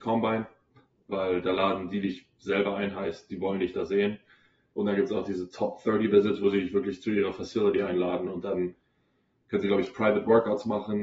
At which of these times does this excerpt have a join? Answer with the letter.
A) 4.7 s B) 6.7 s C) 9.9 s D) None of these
A